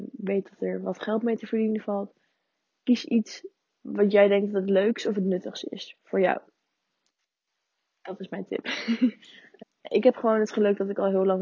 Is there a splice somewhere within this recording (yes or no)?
yes